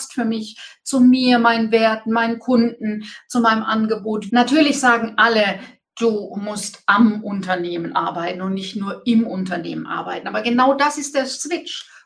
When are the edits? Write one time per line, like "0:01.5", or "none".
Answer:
0:04.3

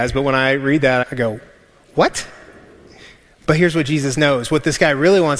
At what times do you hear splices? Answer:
0:01.0

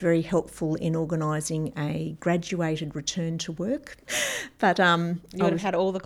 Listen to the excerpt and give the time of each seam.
0:04.1

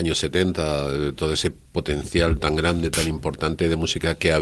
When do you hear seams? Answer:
0:01.2

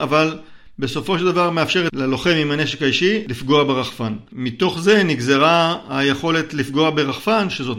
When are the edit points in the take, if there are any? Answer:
0:04.3

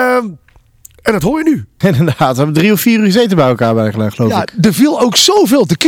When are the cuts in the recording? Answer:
0:01.8

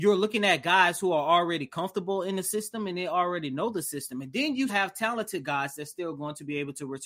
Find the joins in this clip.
0:04.7

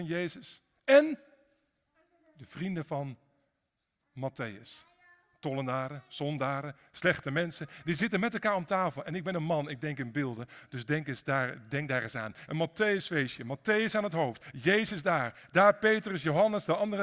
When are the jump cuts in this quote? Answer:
0:12.5

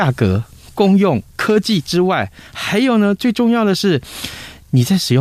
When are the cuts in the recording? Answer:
0:01.3

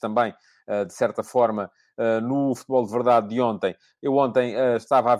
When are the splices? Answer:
none

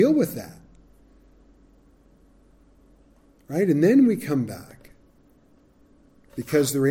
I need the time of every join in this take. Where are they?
none

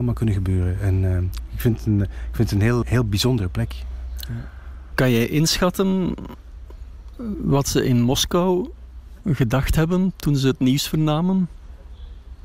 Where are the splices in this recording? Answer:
0:02.8

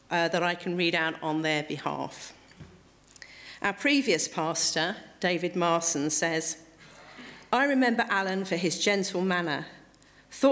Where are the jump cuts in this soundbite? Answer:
none

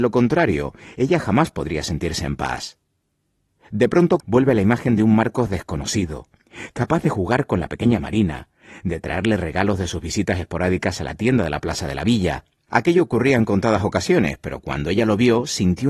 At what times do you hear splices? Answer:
0:04.2

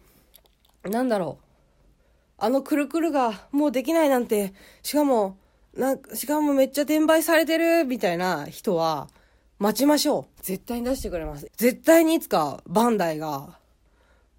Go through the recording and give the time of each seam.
0:10.4
0:11.5

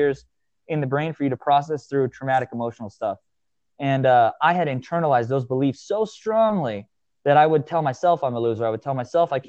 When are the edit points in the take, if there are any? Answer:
none

